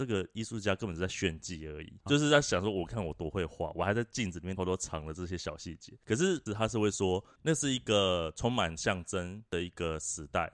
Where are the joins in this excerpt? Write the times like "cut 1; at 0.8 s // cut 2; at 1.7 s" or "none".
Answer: cut 1; at 2.1 s // cut 2; at 4.6 s // cut 3; at 6.5 s